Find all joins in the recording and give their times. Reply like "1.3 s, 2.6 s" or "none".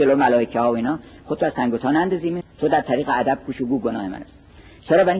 2.4 s